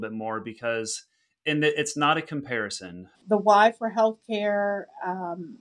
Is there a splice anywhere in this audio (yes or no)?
yes